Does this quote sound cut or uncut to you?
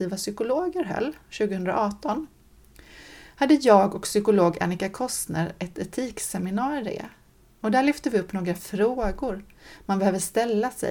uncut